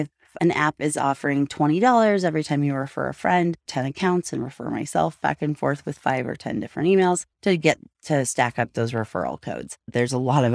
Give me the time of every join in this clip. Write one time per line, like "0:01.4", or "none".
0:03.7